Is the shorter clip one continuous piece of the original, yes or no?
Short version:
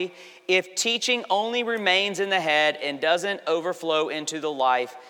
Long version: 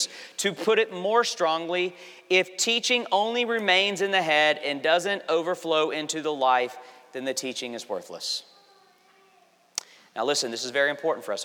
yes